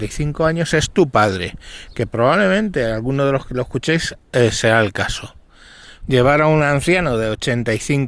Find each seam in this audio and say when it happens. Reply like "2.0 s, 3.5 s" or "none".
6.0 s